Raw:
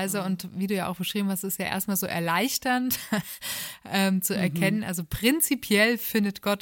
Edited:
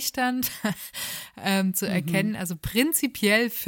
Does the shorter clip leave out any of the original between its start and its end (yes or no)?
no